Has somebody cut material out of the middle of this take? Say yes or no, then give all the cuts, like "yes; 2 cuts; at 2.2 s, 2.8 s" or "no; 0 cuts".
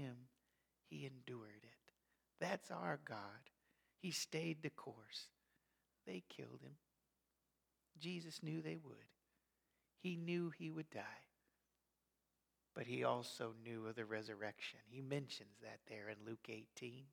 no; 0 cuts